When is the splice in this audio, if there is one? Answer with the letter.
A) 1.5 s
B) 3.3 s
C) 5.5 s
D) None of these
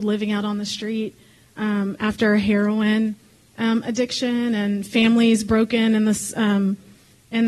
D